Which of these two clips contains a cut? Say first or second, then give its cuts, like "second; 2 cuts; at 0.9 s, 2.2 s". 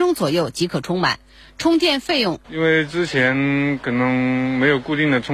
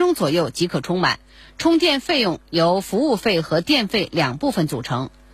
first; 1 cut; at 2.4 s